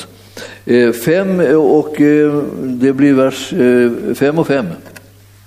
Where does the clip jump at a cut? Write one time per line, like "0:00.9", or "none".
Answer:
none